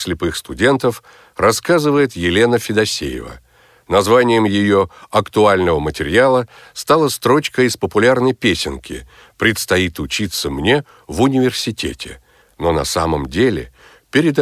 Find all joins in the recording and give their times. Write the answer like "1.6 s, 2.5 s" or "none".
12.4 s